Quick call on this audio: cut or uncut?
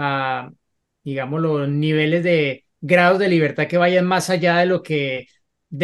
uncut